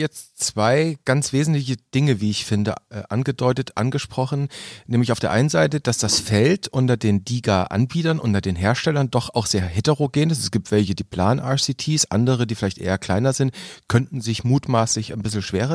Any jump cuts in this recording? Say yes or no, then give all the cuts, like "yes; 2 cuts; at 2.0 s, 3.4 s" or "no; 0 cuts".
no; 0 cuts